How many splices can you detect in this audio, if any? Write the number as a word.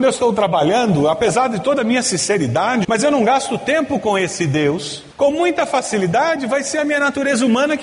two